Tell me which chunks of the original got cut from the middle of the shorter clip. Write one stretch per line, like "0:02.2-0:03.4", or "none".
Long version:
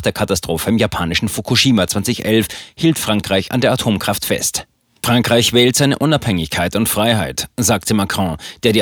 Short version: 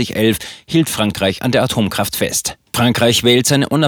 0:04.8-0:05.0

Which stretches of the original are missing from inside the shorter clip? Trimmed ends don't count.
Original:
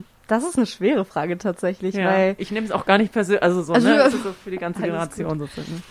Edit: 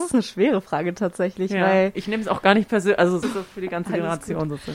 0:03.7-0:04.1

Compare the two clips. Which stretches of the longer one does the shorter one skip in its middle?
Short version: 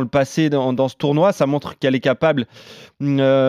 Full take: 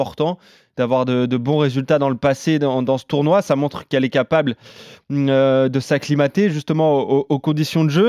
none

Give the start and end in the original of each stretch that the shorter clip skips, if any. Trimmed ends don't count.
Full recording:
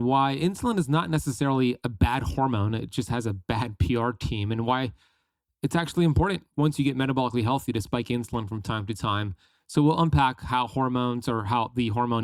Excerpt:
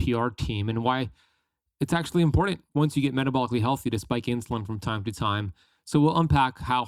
none

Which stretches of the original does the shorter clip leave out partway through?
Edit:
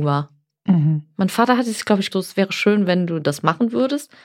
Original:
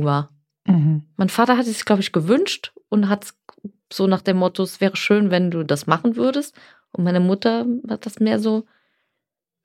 0:02.1-0:04.6

